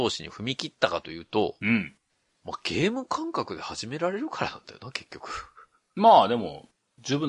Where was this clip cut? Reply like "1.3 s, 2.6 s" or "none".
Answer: none